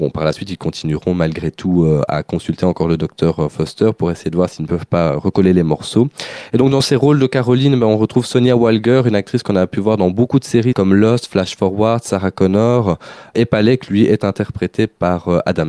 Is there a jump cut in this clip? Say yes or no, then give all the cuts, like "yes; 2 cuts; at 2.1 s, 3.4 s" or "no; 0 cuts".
no; 0 cuts